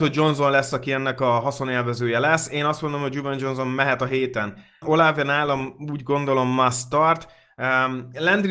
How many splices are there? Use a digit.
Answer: 1